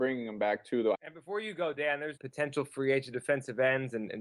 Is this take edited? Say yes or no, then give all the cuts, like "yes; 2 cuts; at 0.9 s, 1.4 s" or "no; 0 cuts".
yes; 2 cuts; at 0.9 s, 2.2 s